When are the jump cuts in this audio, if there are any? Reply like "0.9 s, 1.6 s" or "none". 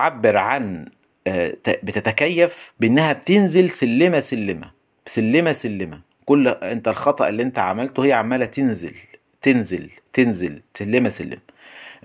none